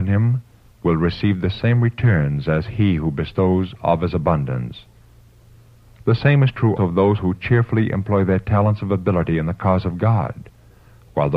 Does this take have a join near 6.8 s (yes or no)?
yes